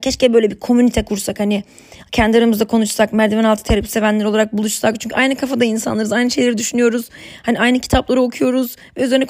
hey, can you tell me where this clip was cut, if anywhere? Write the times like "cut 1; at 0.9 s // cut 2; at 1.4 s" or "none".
none